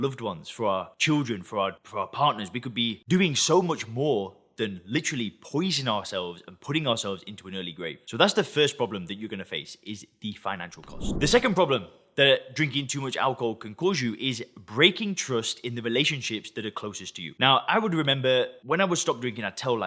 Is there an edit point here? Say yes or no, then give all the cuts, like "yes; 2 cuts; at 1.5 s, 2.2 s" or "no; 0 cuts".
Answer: no; 0 cuts